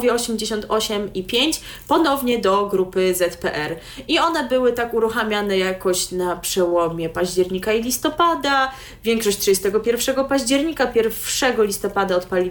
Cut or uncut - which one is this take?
uncut